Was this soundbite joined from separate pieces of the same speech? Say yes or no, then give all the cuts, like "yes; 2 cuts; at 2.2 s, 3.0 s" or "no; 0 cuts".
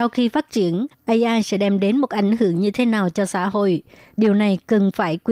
no; 0 cuts